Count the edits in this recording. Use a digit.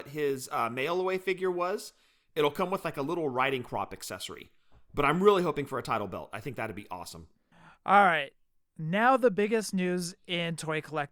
0